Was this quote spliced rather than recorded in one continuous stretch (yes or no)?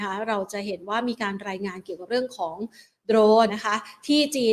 yes